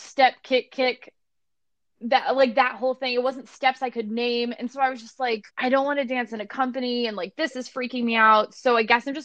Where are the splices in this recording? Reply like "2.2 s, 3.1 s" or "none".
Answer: 5.5 s